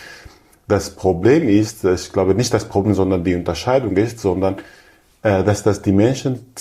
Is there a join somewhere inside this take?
no; 0 cuts

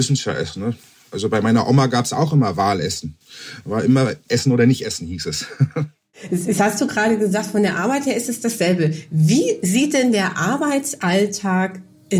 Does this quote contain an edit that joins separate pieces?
no; 0 cuts

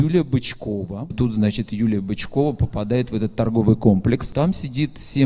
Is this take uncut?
no; 2 cuts; at 1.1 s, 4.3 s

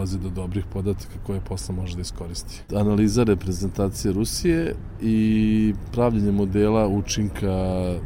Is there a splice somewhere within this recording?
yes; 1 cut; at 2.7 s

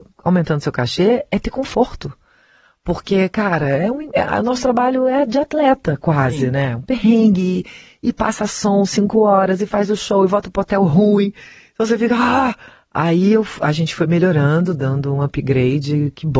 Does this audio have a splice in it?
no; 0 cuts

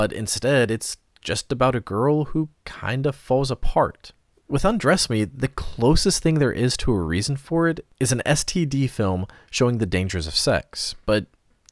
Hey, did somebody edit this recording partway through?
yes; 1 cut; at 4.3 s

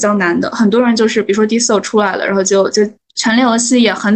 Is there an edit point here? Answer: yes; 1 cut; at 3.0 s

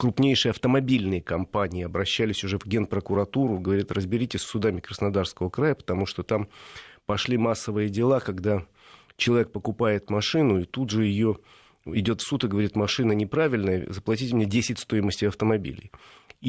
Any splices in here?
no; 0 cuts

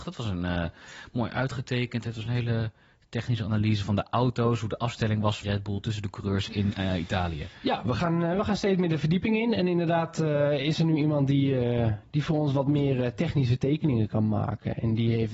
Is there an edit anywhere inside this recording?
yes; 1 cut; at 5.4 s

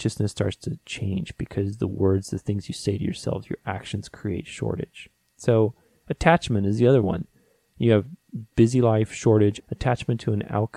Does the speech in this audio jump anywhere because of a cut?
yes; 1 cut; at 9.6 s

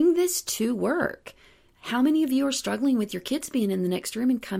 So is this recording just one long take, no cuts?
yes; 0 cuts

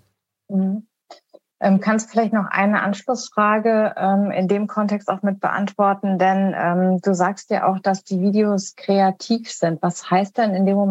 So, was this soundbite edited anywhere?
no; 0 cuts

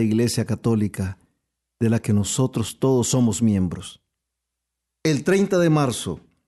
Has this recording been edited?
no; 0 cuts

